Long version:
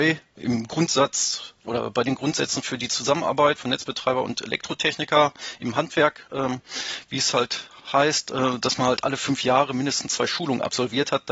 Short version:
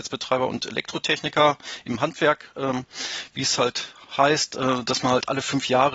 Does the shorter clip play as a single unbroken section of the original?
yes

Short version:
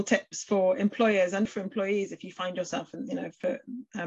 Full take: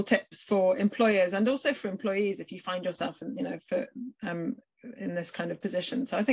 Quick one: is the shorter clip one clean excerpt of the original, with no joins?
no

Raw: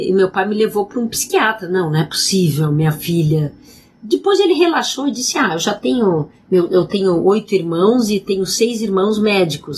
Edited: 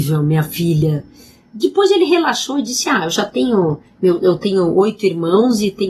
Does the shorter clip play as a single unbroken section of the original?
yes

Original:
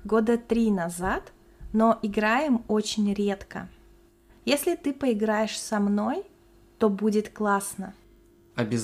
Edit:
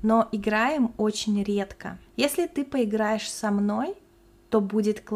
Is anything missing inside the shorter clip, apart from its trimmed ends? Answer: yes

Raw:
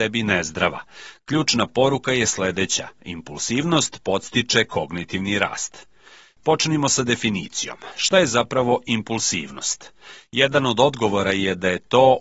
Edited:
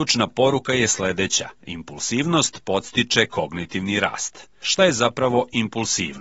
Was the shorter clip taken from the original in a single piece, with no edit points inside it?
no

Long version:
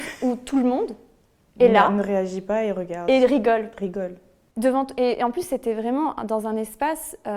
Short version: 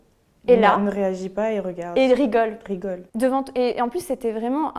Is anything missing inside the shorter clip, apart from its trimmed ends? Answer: yes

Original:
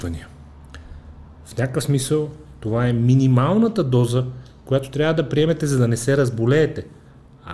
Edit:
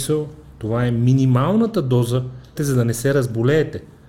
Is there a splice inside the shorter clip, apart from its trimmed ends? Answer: yes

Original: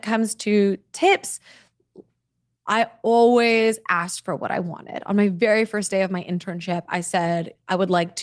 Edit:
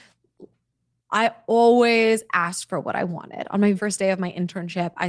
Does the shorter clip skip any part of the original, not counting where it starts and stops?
yes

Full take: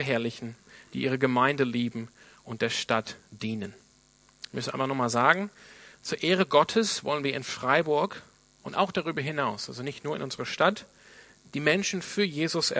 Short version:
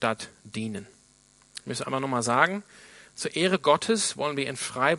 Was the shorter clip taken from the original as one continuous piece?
yes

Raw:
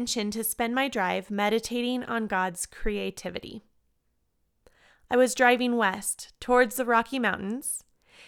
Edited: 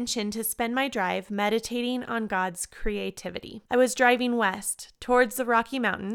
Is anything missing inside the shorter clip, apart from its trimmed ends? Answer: yes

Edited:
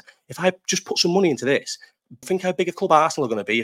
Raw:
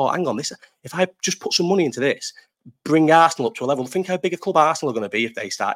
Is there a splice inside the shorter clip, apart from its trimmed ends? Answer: yes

